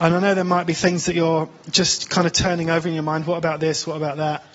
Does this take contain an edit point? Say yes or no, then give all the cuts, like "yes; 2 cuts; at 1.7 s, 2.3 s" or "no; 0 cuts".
no; 0 cuts